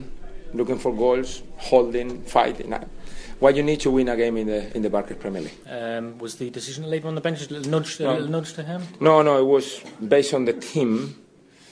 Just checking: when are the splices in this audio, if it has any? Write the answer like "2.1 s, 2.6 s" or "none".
5.6 s, 7.5 s